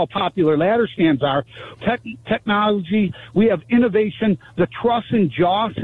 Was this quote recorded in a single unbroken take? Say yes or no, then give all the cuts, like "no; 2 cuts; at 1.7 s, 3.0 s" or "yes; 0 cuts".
no; 1 cut; at 1.7 s